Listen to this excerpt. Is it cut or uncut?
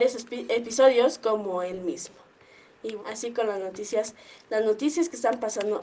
cut